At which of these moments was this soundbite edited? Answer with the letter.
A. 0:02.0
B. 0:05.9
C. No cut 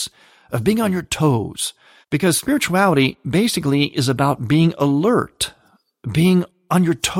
A